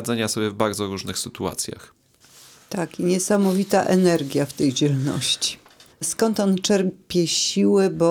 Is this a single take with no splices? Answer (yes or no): no